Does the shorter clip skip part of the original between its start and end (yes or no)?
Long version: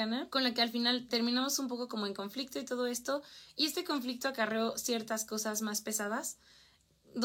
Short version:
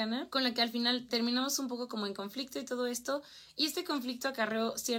no